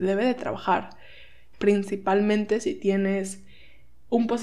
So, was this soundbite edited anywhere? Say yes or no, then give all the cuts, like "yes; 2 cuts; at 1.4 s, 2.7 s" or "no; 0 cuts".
yes; 1 cut; at 1.5 s